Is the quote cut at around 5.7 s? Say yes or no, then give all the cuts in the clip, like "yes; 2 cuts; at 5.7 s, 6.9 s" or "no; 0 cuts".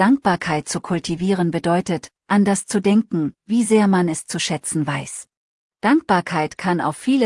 yes; 2 cuts; at 3.4 s, 5.7 s